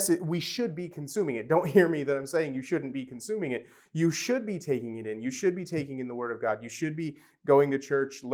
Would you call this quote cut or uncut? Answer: uncut